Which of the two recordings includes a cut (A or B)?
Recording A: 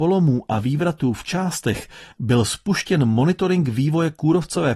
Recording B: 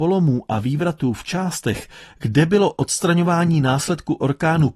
A